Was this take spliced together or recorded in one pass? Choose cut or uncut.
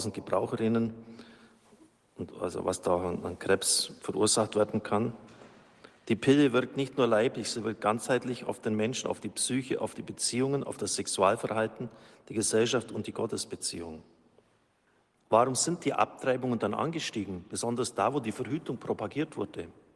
cut